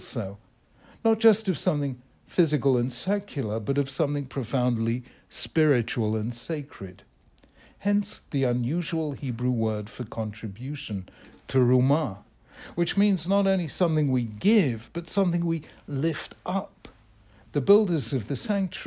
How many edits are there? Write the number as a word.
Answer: zero